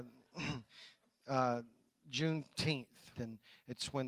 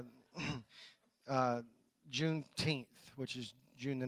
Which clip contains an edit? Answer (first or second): first